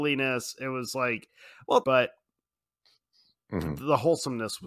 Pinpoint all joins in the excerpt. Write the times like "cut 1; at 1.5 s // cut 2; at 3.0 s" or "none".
cut 1; at 1.8 s

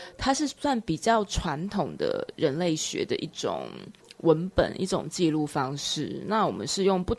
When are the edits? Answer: none

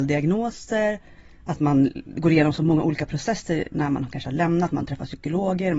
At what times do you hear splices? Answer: none

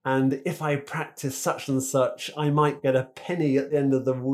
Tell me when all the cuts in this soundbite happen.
none

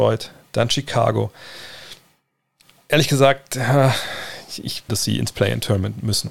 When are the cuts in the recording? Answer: cut 1; at 4.9 s

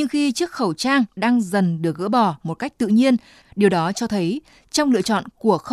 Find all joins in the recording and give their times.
cut 1; at 3.4 s

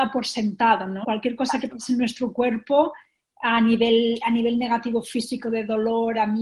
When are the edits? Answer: cut 1; at 1.0 s

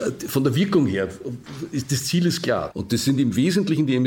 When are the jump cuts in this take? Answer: cut 1; at 2.7 s

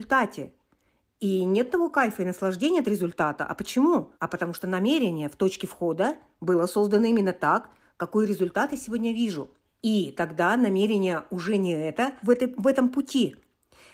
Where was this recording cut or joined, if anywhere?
cut 1; at 4.1 s // cut 2; at 9.7 s // cut 3; at 12.2 s

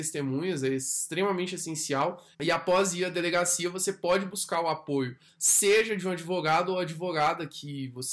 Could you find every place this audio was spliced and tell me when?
cut 1; at 2.3 s // cut 2; at 5.3 s

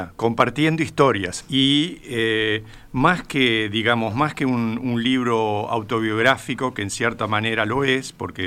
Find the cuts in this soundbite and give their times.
cut 1; at 1.4 s

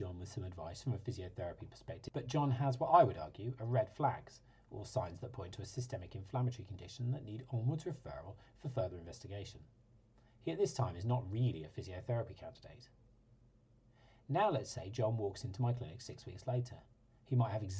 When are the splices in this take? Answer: none

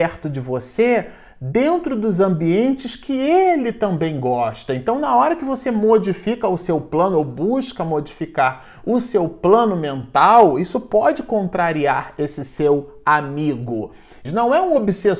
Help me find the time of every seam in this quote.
cut 1; at 14.2 s

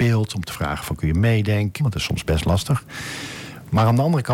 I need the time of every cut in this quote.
cut 1; at 1.8 s

